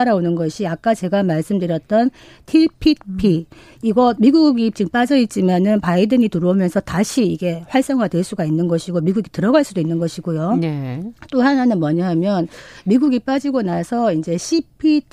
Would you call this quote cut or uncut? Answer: uncut